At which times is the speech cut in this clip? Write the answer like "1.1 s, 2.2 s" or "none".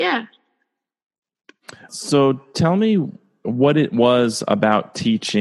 1.9 s